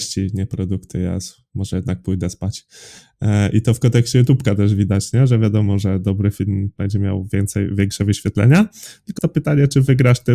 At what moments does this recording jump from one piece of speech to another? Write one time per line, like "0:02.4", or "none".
0:09.2

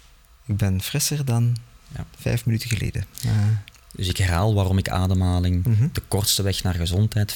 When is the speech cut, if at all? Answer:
none

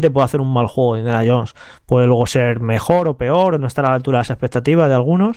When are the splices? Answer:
none

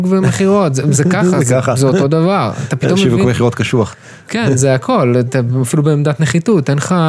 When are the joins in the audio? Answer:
none

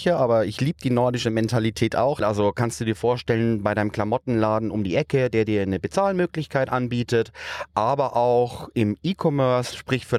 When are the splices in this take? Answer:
0:02.2

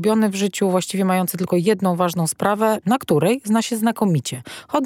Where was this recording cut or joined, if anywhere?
0:02.8

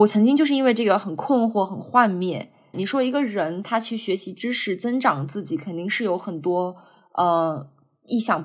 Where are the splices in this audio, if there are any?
0:02.7

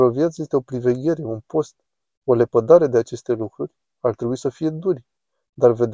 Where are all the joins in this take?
none

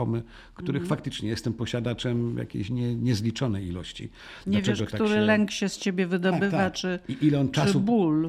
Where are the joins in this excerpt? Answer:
0:04.4

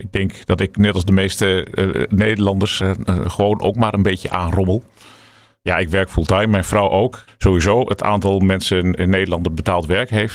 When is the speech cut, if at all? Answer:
0:02.8
0:07.3

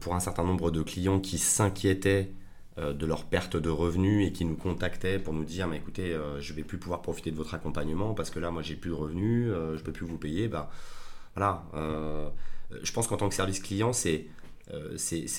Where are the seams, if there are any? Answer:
none

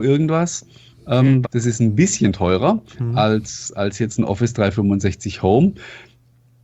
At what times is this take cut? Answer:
0:01.4

